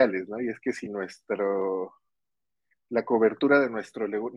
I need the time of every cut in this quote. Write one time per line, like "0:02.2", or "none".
none